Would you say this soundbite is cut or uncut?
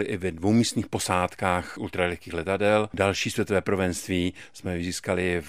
uncut